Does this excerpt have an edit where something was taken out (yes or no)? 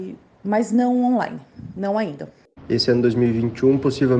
yes